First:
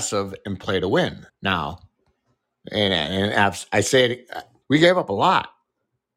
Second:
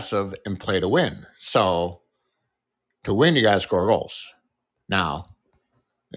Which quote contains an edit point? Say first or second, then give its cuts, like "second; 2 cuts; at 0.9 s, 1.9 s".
first; 2 cuts; at 1.3 s, 4.6 s